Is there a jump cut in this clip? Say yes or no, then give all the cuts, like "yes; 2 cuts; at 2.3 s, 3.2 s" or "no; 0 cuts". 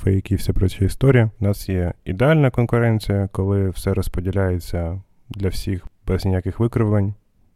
yes; 1 cut; at 1.4 s